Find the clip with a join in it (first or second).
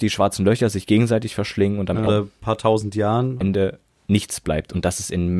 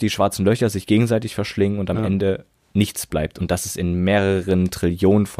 first